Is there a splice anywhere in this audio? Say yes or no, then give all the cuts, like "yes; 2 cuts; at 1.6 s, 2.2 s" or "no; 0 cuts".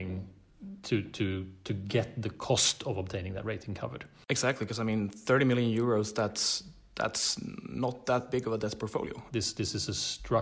yes; 1 cut; at 9.3 s